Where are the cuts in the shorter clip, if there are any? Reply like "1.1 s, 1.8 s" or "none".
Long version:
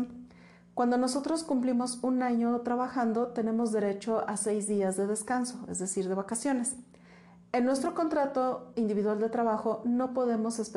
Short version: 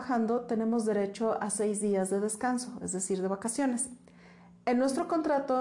none